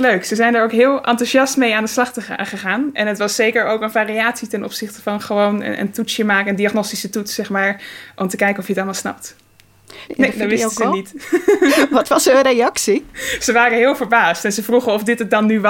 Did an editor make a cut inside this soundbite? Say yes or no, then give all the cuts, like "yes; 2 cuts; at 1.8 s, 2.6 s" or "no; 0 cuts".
yes; 1 cut; at 10.1 s